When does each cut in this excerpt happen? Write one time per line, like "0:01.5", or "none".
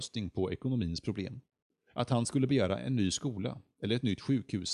0:01.9